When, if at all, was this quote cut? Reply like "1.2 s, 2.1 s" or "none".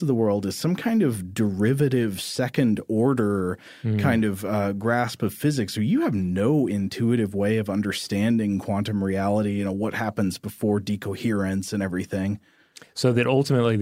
none